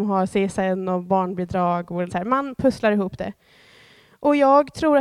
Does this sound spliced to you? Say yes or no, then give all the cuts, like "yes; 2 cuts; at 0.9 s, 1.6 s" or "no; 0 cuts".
yes; 1 cut; at 2.1 s